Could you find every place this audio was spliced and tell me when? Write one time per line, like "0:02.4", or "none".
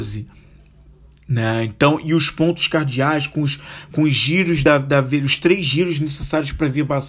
none